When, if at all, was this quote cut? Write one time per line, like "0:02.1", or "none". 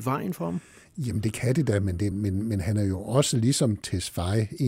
0:02.1